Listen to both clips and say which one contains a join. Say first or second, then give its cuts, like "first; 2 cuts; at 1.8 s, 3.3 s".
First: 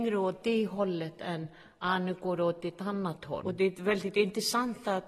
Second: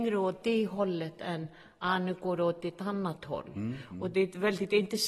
first; 1 cut; at 3.4 s